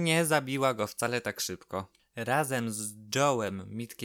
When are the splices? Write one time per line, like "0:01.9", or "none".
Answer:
none